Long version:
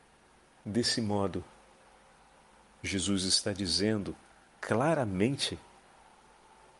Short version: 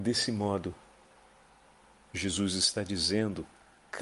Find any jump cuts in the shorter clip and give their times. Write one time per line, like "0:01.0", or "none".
none